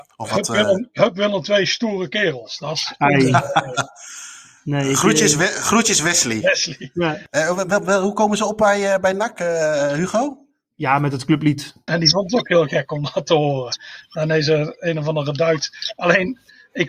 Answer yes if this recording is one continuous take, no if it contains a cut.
no